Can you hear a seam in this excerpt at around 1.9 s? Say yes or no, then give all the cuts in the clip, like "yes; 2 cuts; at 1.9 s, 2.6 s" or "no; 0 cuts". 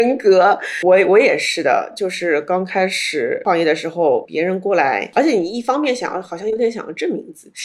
no; 0 cuts